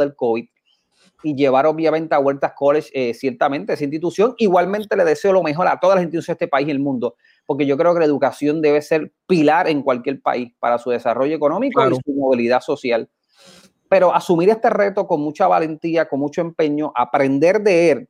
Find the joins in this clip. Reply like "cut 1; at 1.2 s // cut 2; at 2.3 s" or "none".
none